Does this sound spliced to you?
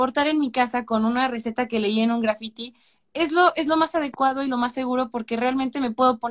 no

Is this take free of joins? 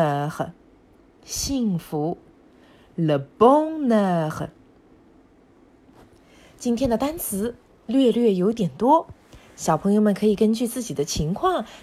yes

